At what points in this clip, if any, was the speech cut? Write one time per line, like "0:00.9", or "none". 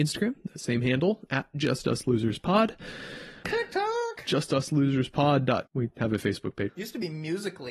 0:03.4
0:05.7
0:06.7